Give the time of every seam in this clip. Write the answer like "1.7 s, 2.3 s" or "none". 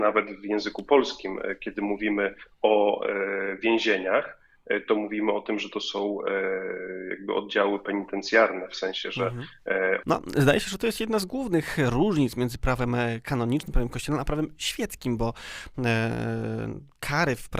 10.0 s